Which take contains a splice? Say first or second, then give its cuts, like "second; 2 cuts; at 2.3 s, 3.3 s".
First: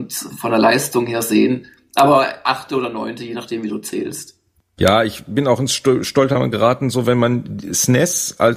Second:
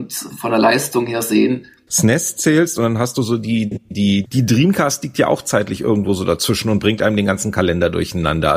second; 2 cuts; at 1.9 s, 4.2 s